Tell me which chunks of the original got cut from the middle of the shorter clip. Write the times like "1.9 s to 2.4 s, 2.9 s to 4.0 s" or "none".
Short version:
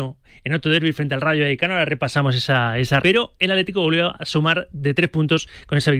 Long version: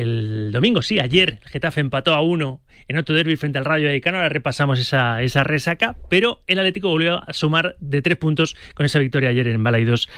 5.4 s to 6.1 s